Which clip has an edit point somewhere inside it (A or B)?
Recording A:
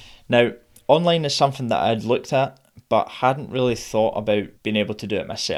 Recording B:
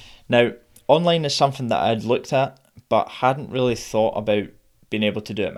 A